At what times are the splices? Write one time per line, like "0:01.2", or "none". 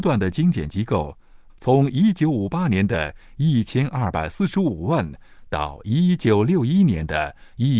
0:01.5